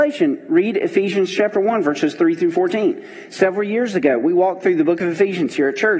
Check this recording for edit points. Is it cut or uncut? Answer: uncut